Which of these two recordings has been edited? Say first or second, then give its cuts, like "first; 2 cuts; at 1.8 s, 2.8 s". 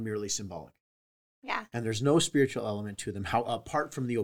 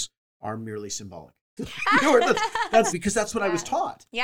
second; 2 cuts; at 1.6 s, 2.9 s